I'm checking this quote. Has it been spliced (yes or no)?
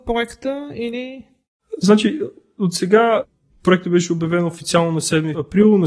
no